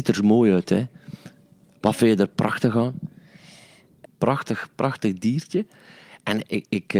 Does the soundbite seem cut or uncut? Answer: cut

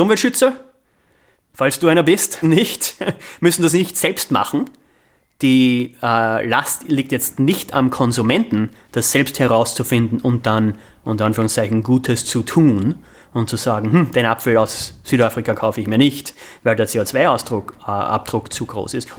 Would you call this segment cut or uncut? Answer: cut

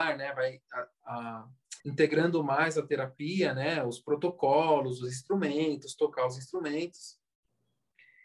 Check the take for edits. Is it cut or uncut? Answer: cut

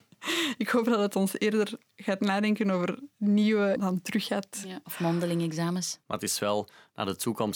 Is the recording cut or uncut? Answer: cut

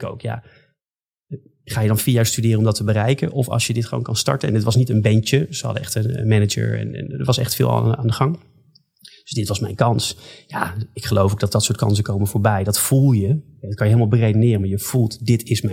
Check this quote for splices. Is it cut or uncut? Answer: uncut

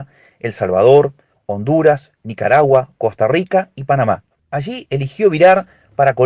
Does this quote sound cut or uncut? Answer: uncut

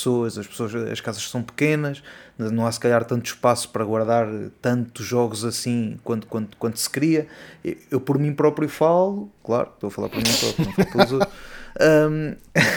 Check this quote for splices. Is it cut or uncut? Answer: uncut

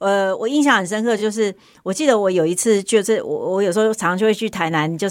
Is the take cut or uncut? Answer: uncut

